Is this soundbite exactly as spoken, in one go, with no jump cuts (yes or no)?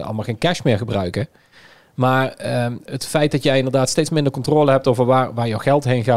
no